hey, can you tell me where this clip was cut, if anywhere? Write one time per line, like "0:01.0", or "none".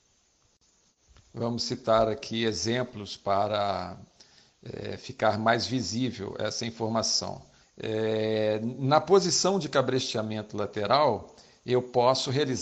0:07.6